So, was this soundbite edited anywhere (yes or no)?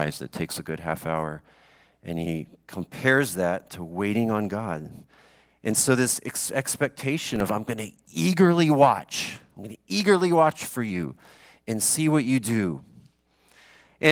no